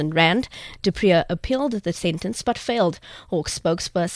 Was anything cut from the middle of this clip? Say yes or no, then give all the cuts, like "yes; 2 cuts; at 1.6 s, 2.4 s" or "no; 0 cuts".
no; 0 cuts